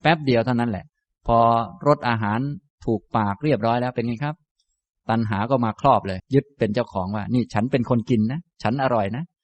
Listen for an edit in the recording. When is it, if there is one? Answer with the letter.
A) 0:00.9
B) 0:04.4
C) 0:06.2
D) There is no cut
C